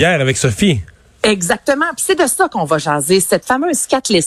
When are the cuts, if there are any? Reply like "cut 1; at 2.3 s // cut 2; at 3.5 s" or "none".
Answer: none